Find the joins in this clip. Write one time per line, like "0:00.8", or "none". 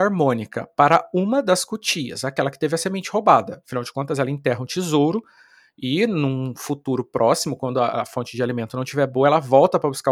none